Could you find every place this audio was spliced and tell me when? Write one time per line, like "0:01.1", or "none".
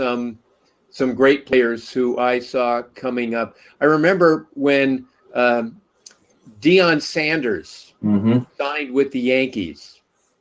none